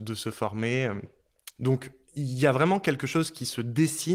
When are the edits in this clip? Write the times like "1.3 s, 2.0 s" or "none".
1.6 s